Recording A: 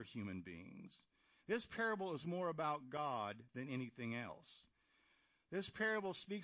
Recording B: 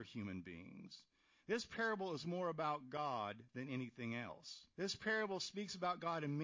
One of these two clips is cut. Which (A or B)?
B